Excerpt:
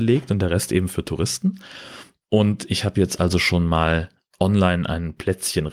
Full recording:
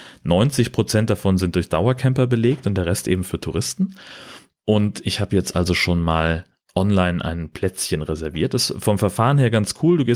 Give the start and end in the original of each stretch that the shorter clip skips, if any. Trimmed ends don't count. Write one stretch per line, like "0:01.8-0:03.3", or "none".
none